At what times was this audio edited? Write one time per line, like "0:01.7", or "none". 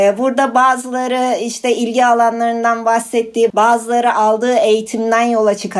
0:03.5